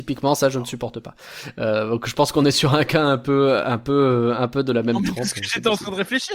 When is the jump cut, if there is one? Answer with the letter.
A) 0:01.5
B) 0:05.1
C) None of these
C